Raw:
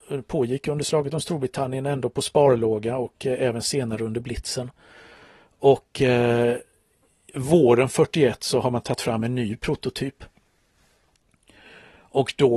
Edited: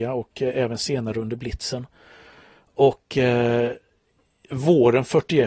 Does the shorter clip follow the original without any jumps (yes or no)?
yes